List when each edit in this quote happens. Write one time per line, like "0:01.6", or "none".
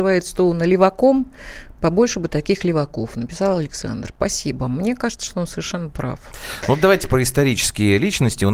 none